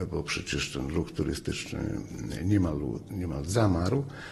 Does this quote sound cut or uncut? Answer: uncut